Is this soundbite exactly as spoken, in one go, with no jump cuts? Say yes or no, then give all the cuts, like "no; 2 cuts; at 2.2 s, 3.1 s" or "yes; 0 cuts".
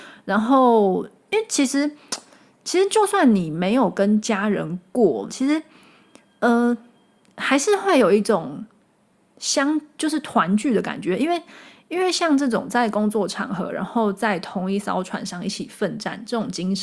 no; 1 cut; at 5.3 s